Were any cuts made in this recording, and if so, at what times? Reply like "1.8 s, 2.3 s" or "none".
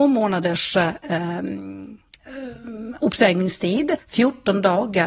4.0 s